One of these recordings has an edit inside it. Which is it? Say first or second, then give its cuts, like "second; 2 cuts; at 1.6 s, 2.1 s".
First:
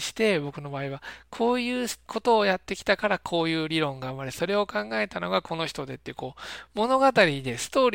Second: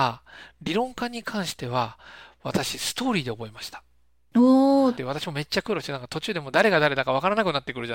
second; 1 cut; at 5.0 s